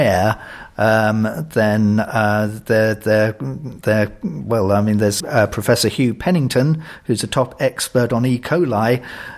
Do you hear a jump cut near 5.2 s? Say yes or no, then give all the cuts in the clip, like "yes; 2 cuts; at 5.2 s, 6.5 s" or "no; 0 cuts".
yes; 1 cut; at 5.2 s